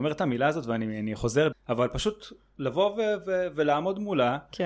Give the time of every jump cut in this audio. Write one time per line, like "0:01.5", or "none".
0:01.5